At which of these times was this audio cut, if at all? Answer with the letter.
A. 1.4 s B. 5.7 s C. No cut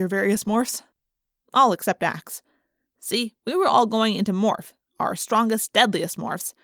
A